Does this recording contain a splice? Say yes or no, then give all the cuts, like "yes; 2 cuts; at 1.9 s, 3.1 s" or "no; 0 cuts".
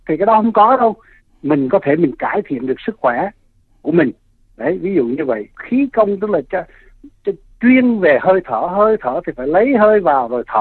no; 0 cuts